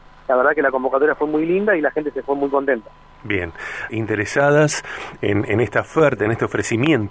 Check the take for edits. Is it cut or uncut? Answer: cut